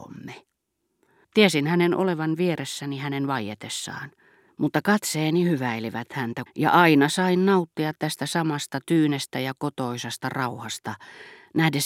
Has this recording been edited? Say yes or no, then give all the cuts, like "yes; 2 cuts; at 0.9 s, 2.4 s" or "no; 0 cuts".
yes; 3 cuts; at 1.2 s, 4.5 s, 6.5 s